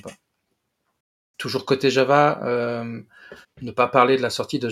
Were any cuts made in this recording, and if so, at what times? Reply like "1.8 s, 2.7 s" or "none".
3.4 s